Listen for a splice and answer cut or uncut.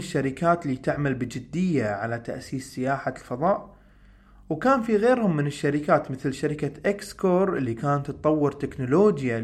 uncut